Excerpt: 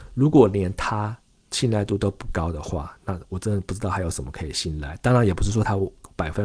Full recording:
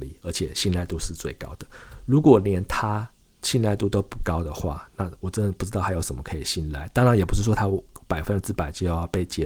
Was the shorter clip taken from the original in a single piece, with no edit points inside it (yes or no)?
yes